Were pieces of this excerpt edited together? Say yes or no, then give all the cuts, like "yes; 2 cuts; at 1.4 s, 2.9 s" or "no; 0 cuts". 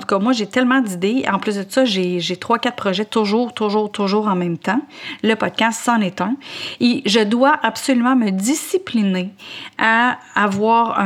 no; 0 cuts